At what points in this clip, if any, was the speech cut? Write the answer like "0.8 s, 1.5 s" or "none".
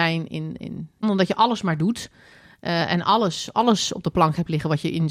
1.0 s